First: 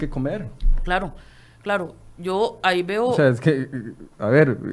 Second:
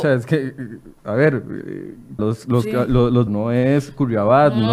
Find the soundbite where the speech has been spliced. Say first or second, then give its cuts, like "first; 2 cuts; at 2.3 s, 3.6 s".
second; 2 cuts; at 2.2 s, 3.3 s